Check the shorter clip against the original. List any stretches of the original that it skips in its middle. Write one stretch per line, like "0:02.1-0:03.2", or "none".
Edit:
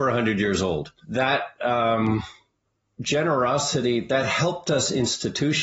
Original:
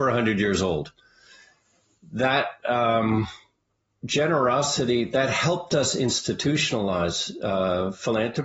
0:01.0-0:02.1